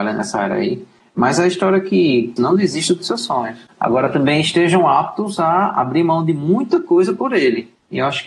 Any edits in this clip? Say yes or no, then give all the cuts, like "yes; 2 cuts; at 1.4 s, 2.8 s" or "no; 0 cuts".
yes; 1 cut; at 2.4 s